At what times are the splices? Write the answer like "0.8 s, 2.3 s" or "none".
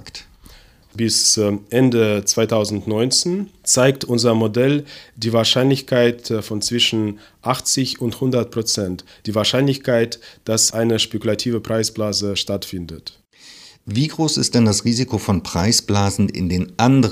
none